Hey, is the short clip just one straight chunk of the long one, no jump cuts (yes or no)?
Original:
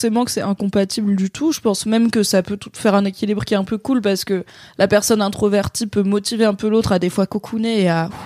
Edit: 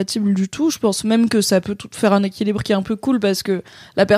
yes